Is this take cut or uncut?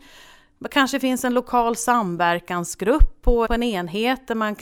cut